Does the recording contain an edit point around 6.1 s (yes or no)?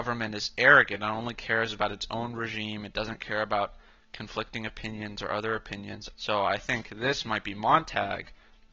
yes